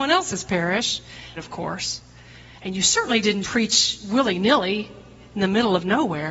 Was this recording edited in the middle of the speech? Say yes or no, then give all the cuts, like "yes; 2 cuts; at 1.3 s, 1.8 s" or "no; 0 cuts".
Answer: yes; 2 cuts; at 1.4 s, 3.4 s